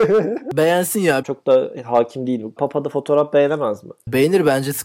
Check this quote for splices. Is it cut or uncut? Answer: cut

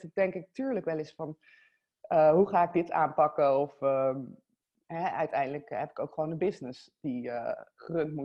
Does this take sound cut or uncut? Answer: uncut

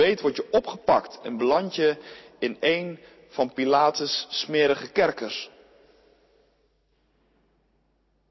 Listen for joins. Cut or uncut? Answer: uncut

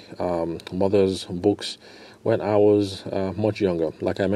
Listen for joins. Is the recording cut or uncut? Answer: uncut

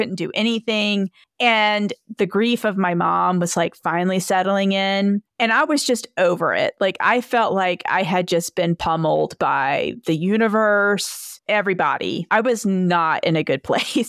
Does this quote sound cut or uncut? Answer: uncut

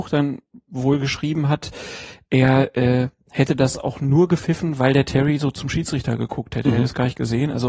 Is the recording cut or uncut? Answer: uncut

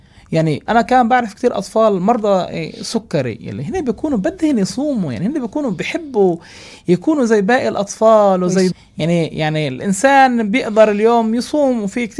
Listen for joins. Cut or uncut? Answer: cut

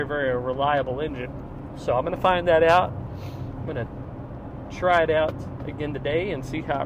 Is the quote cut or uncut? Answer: uncut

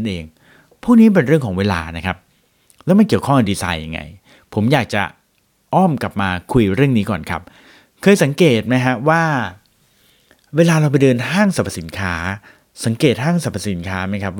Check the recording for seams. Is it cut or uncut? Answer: uncut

